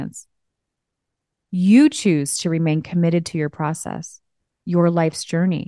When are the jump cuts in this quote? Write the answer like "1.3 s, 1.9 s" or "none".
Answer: none